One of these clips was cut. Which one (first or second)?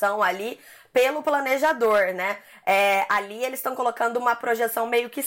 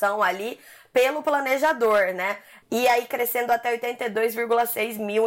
second